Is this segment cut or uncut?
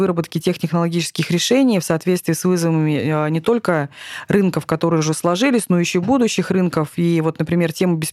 uncut